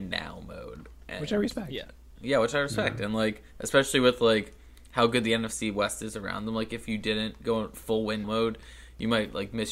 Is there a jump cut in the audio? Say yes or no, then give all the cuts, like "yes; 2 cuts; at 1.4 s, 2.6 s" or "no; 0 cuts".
yes; 1 cut; at 8.2 s